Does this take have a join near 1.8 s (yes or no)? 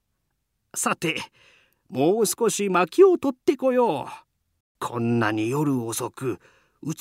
no